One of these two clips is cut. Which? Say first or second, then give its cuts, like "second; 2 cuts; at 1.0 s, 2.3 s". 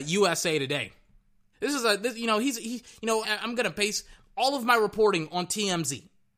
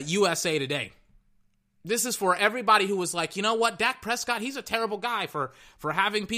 first; 2 cuts; at 1.5 s, 3.2 s